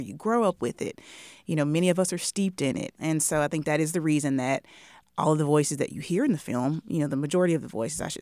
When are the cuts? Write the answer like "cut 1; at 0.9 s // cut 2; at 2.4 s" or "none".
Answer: none